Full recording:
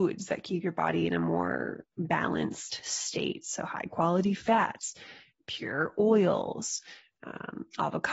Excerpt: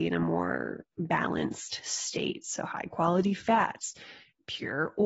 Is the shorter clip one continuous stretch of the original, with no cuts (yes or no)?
yes